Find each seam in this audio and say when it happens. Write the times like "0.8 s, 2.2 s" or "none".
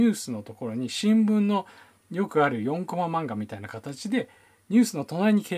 none